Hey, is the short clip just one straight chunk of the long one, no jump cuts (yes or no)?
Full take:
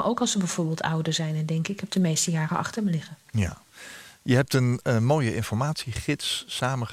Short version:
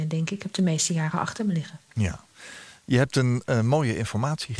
yes